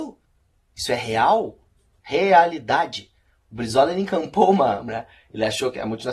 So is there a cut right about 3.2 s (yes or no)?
no